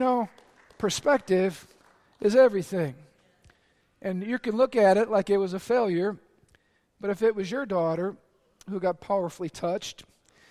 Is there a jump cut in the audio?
no; 0 cuts

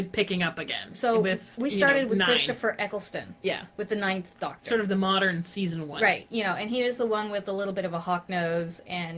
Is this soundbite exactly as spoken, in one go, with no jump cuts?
yes; 0 cuts

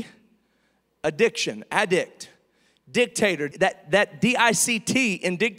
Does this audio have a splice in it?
yes; 1 cut; at 3.5 s

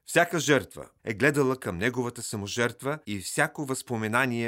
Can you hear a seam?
yes; 2 cuts; at 1.0 s, 3.0 s

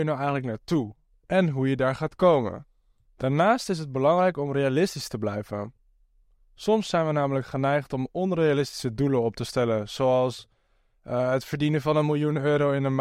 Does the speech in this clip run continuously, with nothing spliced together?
yes; 0 cuts

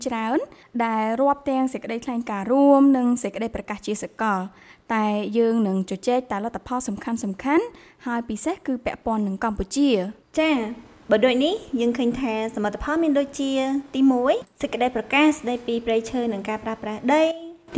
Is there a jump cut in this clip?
no; 0 cuts

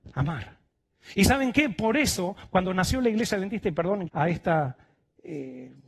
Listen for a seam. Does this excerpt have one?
yes; 1 cut; at 4.1 s

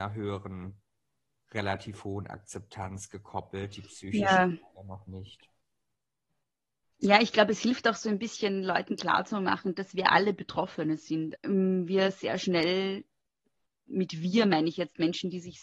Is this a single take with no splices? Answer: no; 1 cut; at 11.4 s

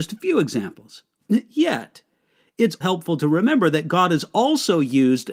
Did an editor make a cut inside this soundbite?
yes; 2 cuts; at 1.2 s, 2.8 s

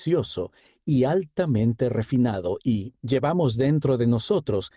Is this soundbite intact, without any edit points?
no; 1 cut; at 3.0 s

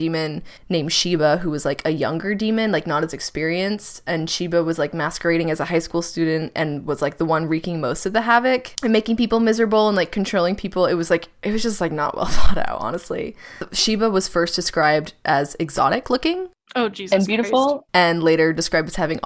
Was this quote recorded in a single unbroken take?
no; 1 cut; at 17.9 s

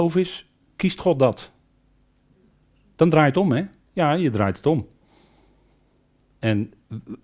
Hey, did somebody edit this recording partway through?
no; 0 cuts

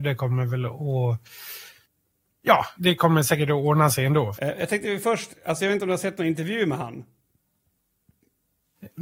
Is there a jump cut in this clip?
yes; 2 cuts; at 2.8 s, 4.3 s

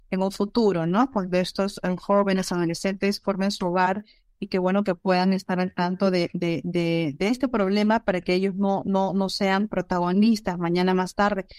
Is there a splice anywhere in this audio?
no; 0 cuts

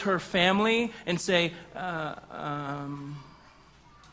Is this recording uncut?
yes; 0 cuts

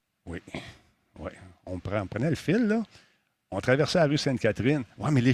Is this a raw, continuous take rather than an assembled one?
yes; 0 cuts

